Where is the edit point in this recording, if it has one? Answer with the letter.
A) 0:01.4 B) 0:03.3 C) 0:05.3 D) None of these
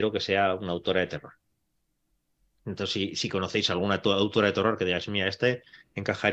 D